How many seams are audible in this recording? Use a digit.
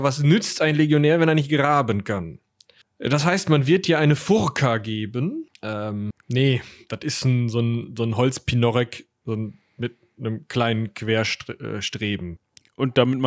1